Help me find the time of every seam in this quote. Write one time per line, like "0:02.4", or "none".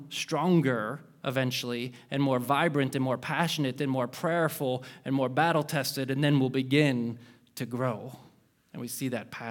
none